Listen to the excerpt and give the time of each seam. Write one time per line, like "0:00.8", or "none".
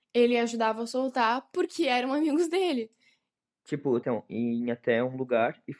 0:04.0